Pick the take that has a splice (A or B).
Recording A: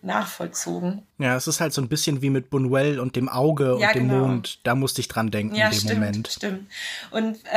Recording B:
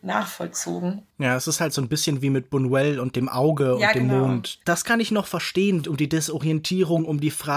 B